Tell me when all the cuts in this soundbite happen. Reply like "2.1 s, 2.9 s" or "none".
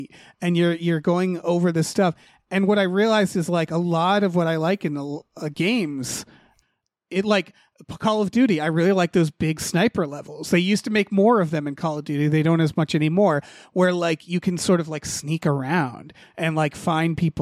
none